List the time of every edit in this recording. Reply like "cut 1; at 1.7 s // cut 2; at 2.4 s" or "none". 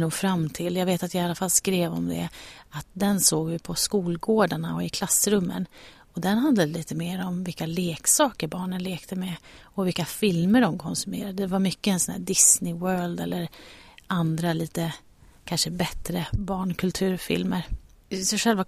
none